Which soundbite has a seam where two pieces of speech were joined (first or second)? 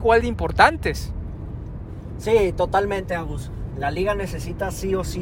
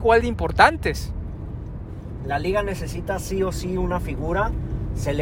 second